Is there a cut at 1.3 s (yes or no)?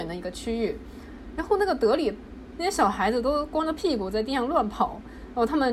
no